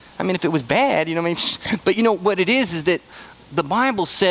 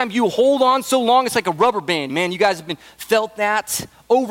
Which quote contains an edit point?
second; 1 cut; at 2.1 s

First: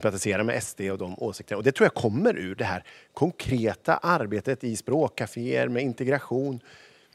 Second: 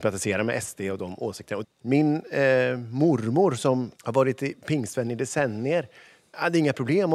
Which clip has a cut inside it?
second; 2 cuts; at 1.6 s, 3.9 s

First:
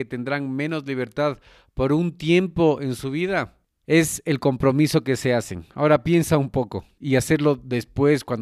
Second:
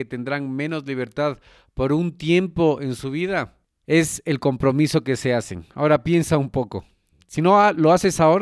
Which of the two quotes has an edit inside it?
first; 1 cut; at 7.0 s

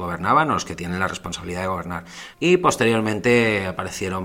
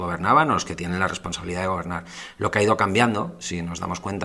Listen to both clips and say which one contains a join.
first; 1 cut; at 2.3 s

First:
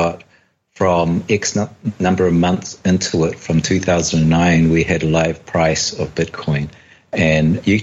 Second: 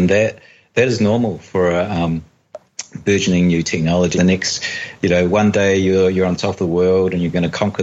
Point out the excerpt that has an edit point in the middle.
second; 1 cut; at 4.1 s

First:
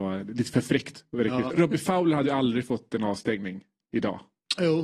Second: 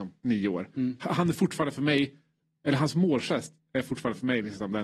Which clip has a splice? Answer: first; 1 cut; at 1.5 s

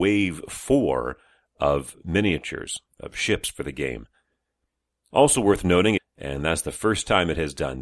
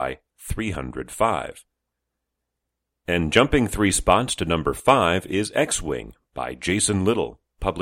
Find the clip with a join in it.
first; 1 cut; at 6.0 s

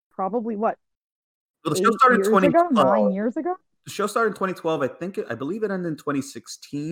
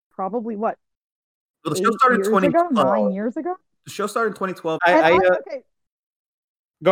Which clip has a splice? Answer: second; 1 cut; at 4.8 s

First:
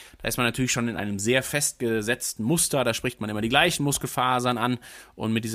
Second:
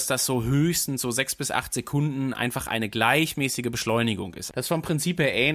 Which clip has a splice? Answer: second; 1 cut; at 4.5 s

